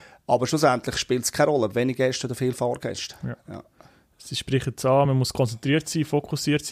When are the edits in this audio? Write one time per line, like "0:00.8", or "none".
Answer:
none